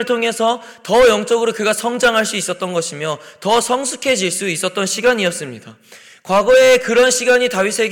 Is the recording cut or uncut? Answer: uncut